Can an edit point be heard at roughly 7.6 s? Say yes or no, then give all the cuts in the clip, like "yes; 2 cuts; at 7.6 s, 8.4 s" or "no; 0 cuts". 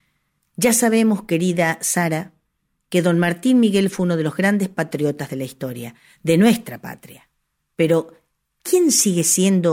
no; 0 cuts